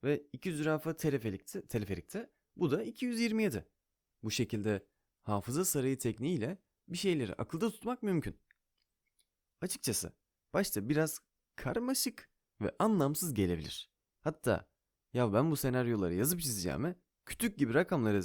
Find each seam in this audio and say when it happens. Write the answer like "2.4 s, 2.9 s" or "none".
none